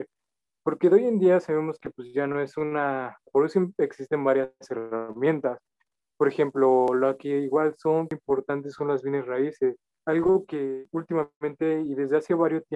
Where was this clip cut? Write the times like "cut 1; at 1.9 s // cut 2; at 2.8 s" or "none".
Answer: cut 1; at 3.3 s